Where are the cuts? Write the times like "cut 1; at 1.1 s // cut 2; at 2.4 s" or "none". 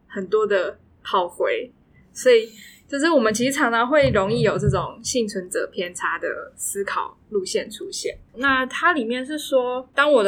cut 1; at 8.3 s